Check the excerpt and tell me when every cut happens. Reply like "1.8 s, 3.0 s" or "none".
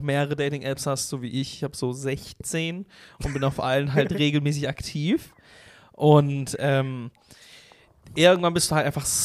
none